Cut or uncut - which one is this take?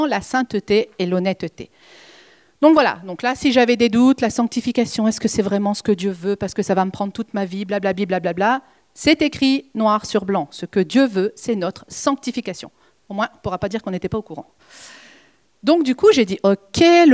uncut